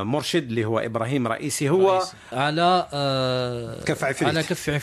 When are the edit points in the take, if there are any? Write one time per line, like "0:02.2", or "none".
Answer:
0:02.3